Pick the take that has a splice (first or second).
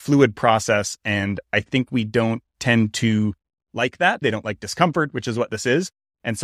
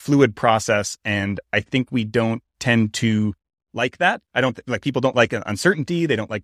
first